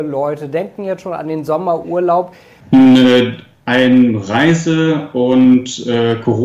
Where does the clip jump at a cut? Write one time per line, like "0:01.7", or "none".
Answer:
0:02.6

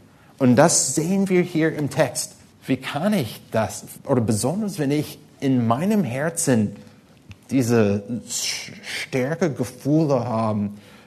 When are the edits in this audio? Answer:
0:02.5
0:04.0

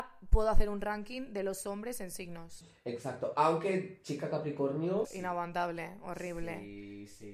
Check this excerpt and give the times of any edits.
0:05.0

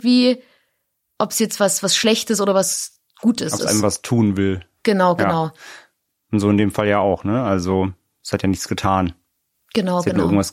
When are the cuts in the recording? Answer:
none

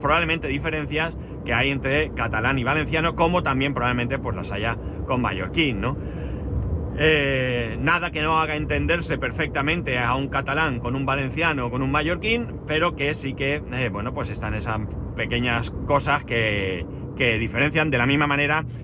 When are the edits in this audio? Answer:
none

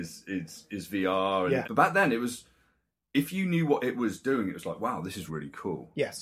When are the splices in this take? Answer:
0:01.6
0:05.3

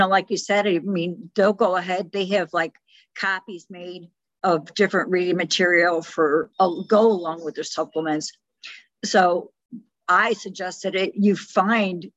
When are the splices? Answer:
0:06.5

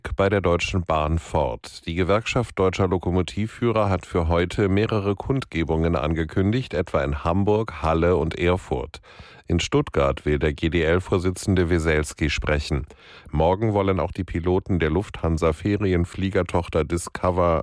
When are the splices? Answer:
0:13.3

